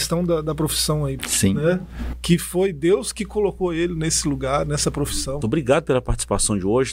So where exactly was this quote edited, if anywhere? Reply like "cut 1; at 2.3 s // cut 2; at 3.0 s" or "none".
cut 1; at 1.2 s // cut 2; at 5.4 s